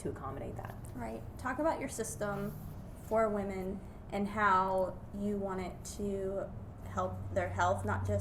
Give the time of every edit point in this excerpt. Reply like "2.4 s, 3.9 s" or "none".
none